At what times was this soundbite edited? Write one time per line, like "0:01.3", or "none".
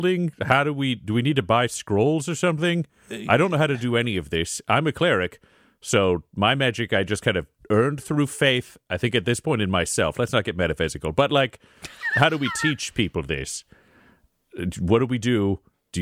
none

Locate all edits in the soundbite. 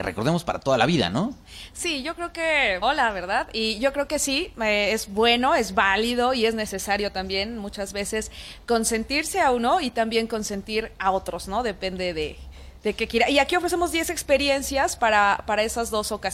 0:02.8

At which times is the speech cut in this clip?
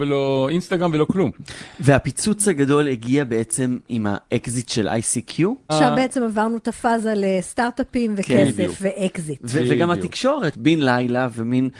0:05.7
0:10.5

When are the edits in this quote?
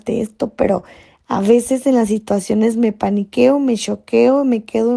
none

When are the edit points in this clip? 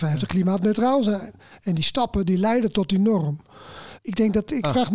0:01.6
0:04.0

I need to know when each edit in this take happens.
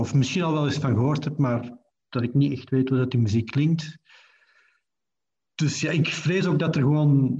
none

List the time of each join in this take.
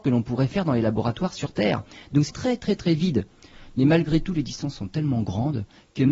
0:02.3

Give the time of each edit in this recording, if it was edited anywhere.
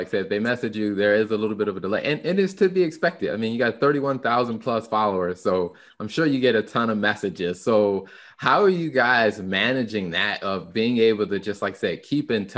none

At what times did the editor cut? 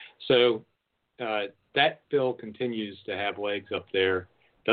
0:01.6

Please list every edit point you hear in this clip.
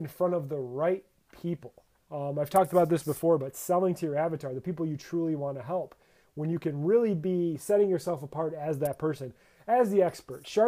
none

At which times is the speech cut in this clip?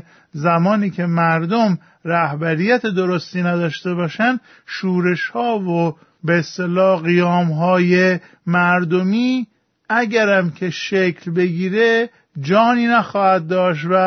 none

